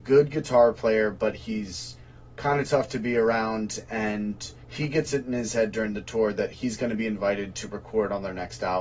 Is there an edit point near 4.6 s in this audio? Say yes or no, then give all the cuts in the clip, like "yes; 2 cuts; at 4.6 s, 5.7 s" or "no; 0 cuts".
yes; 1 cut; at 4.6 s